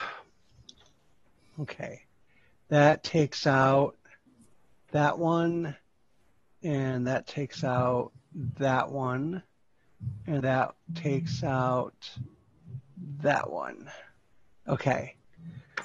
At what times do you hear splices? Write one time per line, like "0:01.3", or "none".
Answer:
0:10.4